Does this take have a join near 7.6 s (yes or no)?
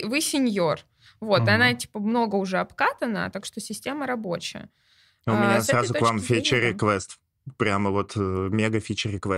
no